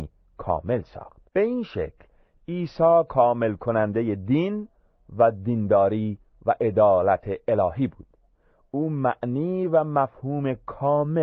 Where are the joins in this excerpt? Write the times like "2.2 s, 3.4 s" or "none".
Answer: 1.3 s